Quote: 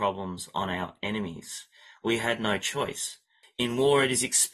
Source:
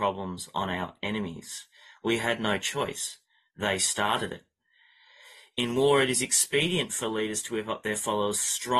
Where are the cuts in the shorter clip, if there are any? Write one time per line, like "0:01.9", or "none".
0:03.4